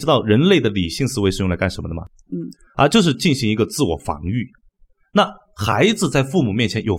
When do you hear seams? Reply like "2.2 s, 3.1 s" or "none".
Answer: 2.3 s